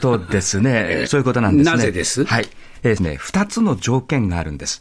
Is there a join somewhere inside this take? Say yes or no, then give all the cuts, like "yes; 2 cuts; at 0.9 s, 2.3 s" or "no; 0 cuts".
yes; 2 cuts; at 1.1 s, 3.0 s